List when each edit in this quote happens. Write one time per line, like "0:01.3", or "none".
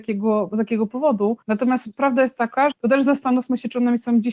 0:01.4
0:02.7